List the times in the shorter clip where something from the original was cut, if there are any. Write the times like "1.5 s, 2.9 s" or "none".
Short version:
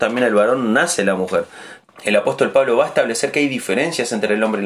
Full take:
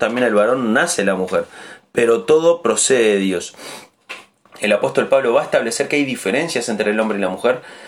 1.8 s